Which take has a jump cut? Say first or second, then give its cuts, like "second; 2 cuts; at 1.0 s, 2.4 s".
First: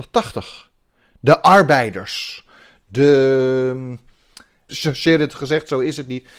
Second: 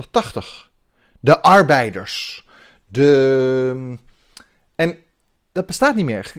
first; 1 cut; at 4.7 s